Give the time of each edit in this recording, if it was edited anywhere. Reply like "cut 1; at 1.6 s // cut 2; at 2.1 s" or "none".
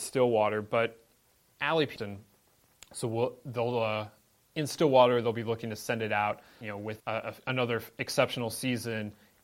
cut 1; at 2.0 s // cut 2; at 7.0 s